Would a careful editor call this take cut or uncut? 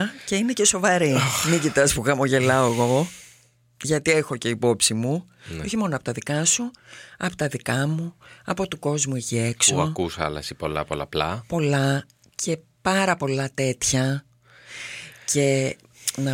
uncut